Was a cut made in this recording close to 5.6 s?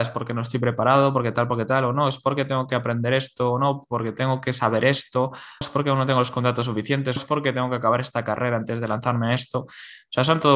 yes; 2 cuts; at 5.6 s, 7.2 s

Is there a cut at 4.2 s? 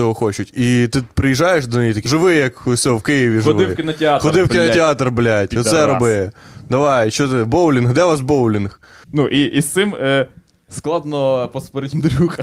no; 2 cuts; at 2.1 s, 9.0 s

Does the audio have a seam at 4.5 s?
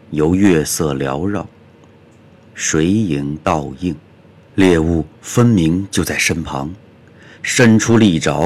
yes; 1 cut; at 4.5 s

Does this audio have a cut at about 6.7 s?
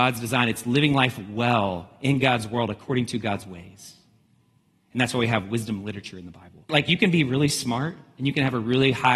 yes; 1 cut; at 6.7 s

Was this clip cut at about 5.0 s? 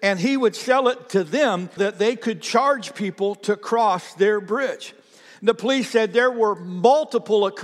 no; 1 cut; at 1.8 s

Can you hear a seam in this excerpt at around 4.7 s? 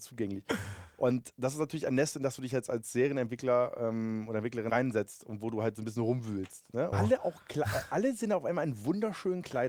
yes; 2 cuts; at 4.7 s, 6.9 s

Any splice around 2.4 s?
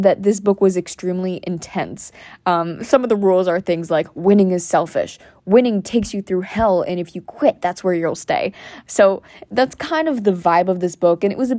no; 0 cuts

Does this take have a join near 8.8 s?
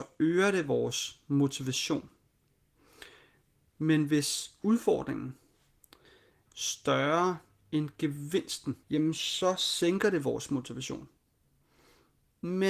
yes; 2 cuts; at 6.5 s, 8.8 s

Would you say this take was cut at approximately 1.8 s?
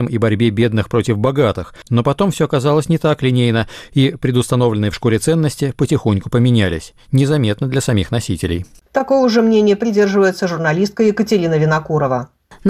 no; 0 cuts

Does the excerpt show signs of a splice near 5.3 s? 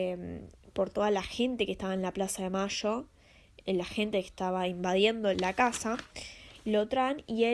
yes; 1 cut; at 5.3 s

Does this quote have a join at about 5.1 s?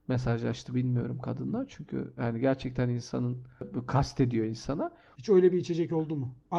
yes; 1 cut; at 5.1 s

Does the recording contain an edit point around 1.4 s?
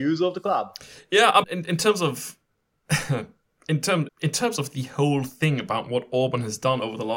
yes; 2 cuts; at 1.4 s, 4.1 s

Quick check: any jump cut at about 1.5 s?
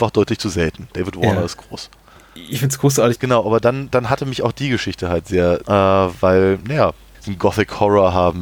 no; 3 cuts; at 3.2 s, 5.6 s, 7.1 s

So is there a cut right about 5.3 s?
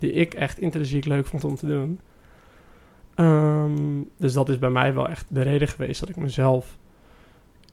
yes; 1 cut; at 5.3 s

